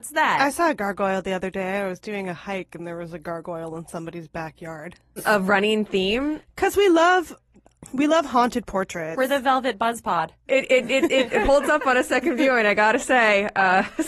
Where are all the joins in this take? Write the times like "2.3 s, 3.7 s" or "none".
5.2 s, 10.5 s